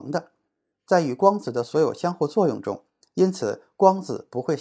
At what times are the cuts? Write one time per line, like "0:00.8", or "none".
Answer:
0:03.0